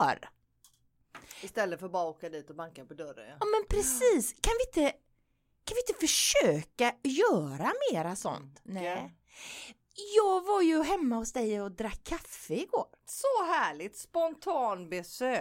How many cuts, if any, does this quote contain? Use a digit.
1